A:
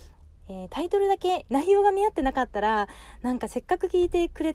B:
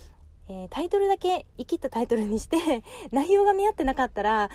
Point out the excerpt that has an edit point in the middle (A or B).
A